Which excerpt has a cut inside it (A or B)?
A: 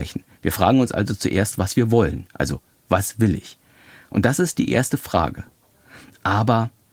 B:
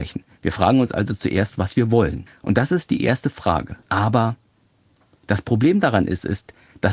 B